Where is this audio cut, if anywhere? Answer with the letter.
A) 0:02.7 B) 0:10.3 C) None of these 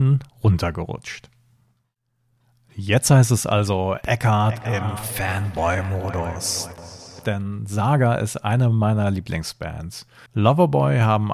B